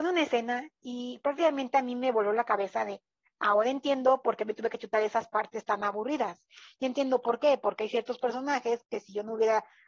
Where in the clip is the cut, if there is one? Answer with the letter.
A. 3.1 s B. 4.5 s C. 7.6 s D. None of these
D